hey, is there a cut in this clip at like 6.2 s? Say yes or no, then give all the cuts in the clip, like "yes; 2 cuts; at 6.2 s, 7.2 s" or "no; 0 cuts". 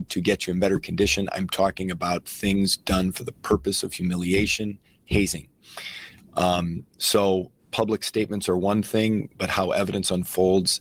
no; 1 cut; at 7.6 s